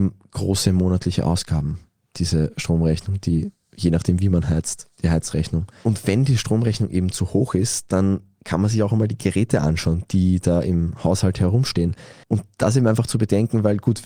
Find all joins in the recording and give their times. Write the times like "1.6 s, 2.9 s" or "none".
12.2 s